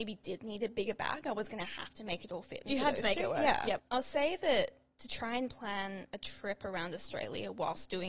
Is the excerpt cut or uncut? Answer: cut